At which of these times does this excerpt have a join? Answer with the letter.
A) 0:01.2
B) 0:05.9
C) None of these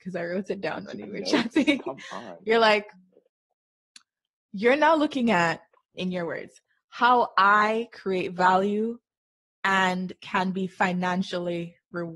B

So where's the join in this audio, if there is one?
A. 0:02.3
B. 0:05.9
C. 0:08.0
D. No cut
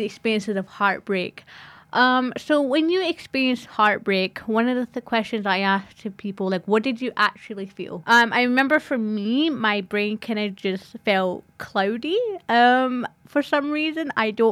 C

